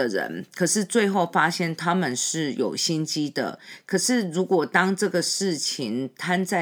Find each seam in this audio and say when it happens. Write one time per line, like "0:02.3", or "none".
none